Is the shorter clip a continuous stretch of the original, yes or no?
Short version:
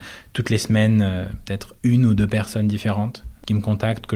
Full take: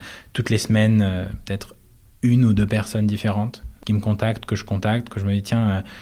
no